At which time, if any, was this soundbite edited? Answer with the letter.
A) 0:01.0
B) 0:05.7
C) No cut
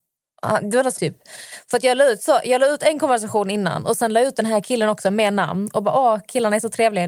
A